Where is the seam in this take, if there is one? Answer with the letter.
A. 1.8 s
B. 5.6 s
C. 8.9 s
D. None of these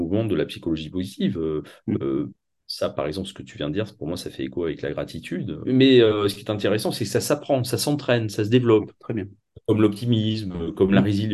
B